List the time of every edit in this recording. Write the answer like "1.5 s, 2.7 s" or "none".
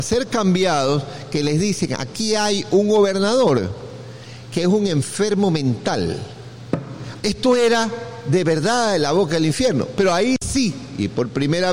7.2 s